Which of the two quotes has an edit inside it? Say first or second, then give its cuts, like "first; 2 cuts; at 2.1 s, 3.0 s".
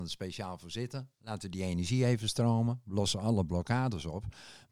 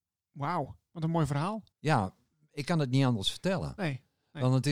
second; 1 cut; at 1.7 s